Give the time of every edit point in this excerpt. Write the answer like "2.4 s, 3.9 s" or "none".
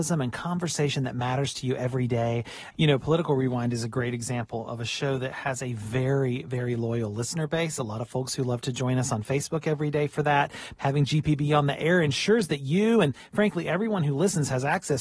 2.7 s, 10.8 s